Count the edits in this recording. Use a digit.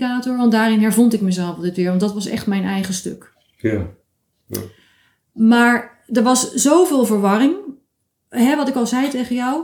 0